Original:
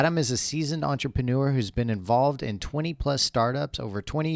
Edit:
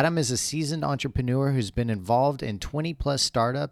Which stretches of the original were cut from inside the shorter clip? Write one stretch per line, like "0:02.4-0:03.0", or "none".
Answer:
none